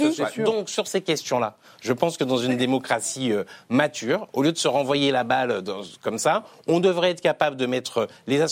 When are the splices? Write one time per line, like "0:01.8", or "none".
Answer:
none